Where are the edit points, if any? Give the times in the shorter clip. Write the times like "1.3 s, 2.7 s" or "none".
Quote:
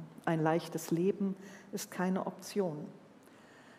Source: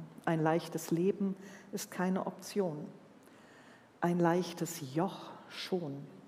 none

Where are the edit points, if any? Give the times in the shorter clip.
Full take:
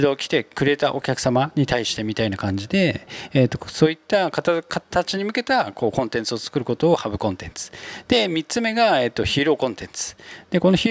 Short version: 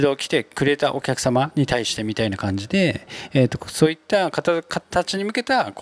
none

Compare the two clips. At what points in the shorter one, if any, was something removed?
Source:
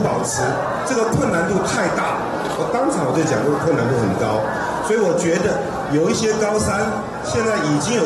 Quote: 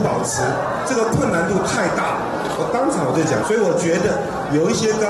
3.4 s

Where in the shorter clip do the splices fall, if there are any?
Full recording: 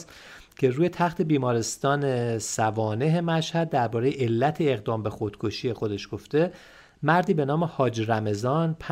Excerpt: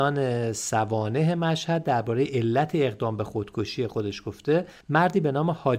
4.8 s

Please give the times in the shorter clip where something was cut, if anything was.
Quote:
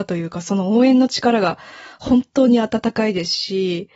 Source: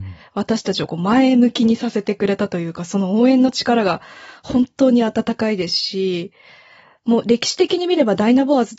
none

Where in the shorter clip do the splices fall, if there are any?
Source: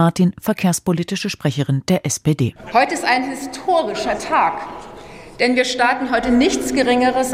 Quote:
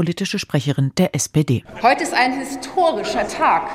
none

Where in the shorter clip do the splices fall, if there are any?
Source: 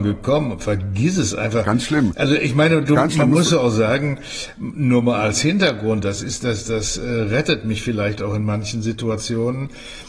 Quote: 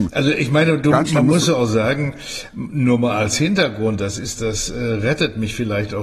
4.4 s

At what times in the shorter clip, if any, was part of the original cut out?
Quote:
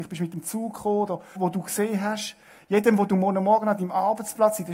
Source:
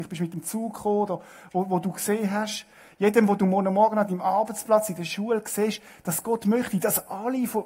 1.4 s

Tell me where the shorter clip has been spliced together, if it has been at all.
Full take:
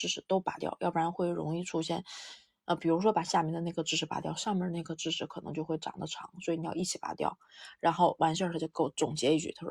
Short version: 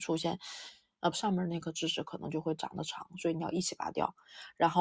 1.1 s

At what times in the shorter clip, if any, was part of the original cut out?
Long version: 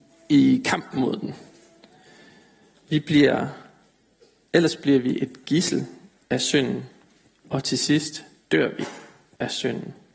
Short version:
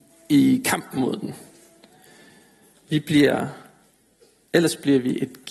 none

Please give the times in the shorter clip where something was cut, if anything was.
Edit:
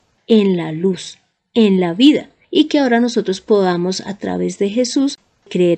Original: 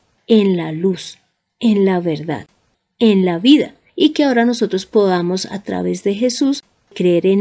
1.4 s

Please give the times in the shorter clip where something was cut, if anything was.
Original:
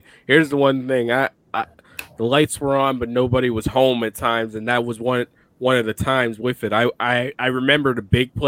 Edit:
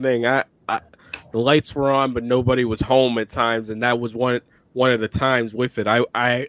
none

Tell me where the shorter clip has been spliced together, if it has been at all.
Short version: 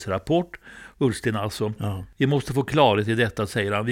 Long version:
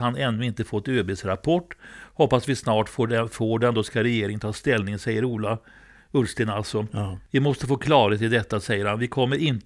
0.9 s

